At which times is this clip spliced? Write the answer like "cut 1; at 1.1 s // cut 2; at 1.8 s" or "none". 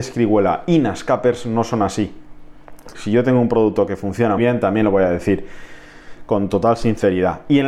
cut 1; at 2.9 s // cut 2; at 4.4 s

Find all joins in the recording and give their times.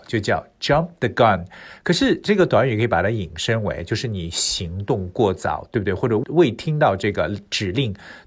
none

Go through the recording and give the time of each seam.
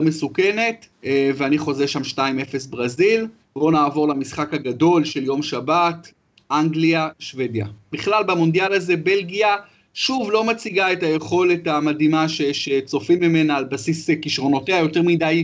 cut 1; at 7.9 s

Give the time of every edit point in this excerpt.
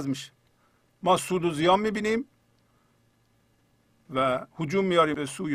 cut 1; at 4.5 s

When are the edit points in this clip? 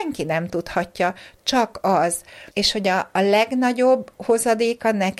cut 1; at 2.5 s

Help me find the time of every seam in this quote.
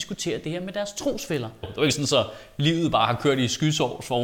cut 1; at 1.6 s

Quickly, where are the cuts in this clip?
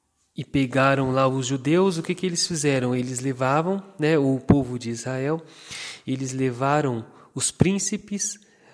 none

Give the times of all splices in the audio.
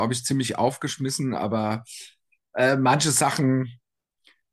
none

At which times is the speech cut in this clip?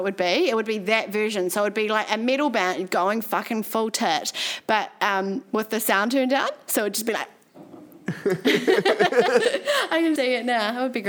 cut 1; at 10.2 s

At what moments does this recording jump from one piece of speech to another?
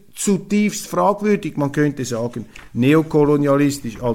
none

